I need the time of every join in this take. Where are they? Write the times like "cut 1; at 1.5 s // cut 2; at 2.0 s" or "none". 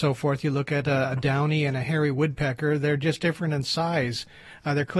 none

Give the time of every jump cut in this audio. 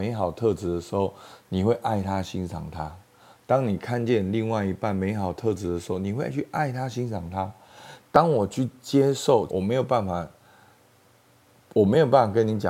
cut 1; at 8.0 s // cut 2; at 9.5 s

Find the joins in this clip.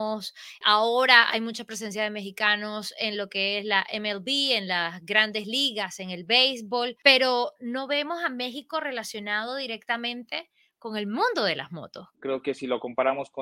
cut 1; at 12.1 s

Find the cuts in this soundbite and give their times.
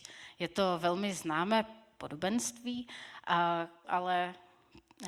cut 1; at 3.8 s

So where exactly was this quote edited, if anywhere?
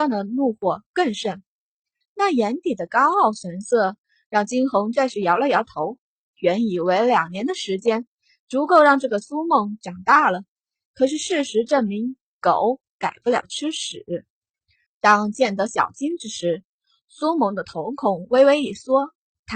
cut 1; at 2.0 s // cut 2; at 14.9 s

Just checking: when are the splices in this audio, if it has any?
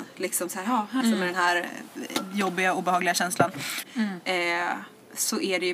cut 1; at 1.0 s // cut 2; at 3.8 s

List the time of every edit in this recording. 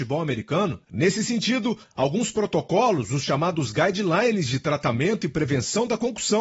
none

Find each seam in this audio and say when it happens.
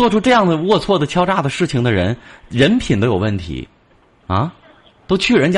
cut 1; at 4.2 s

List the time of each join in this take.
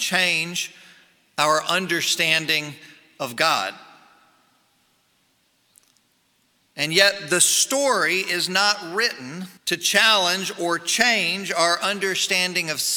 cut 1; at 6.6 s // cut 2; at 9.6 s

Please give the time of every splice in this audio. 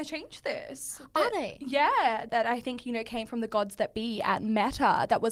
cut 1; at 2.3 s

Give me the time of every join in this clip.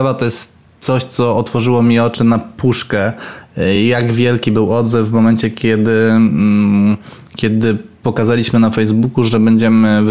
none

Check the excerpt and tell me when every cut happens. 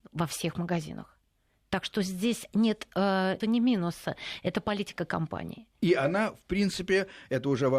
cut 1; at 3.4 s

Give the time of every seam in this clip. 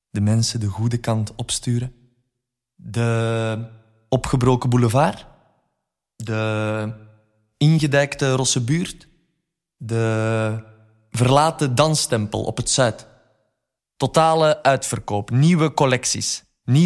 cut 1; at 13.8 s

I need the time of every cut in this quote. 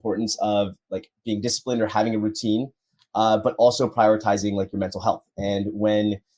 none

